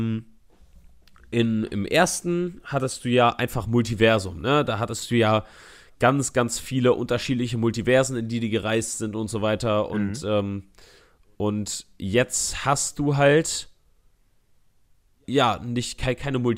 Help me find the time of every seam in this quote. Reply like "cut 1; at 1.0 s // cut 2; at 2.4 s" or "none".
none